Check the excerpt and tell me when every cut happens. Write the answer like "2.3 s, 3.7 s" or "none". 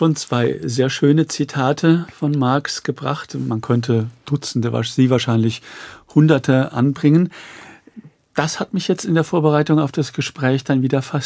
none